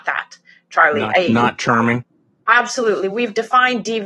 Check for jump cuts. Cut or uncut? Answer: uncut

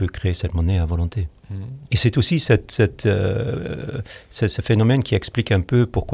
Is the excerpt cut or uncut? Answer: cut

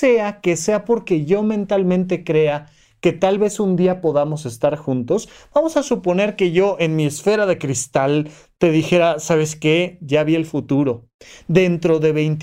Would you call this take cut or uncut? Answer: uncut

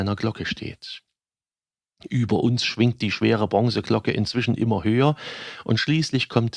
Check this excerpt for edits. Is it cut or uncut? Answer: uncut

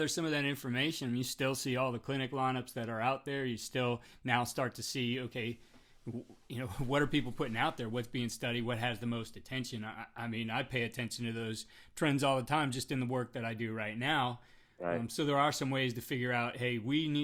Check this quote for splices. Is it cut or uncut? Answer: uncut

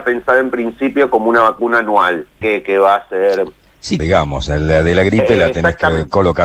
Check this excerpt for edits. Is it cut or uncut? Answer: cut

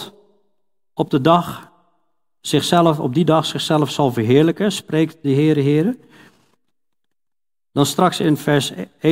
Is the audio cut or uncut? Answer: uncut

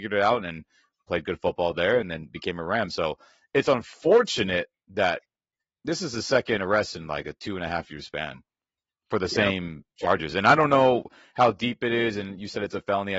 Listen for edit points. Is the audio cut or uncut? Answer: uncut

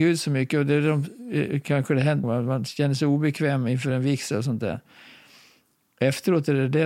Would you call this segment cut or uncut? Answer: cut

